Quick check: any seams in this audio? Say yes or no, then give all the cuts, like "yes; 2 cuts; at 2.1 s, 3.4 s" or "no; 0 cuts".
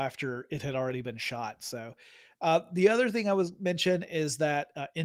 no; 0 cuts